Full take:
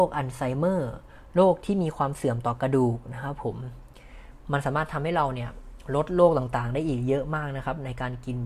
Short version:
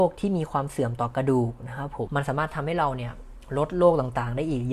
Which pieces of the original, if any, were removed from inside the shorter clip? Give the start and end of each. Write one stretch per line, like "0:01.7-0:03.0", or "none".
0:03.5-0:04.4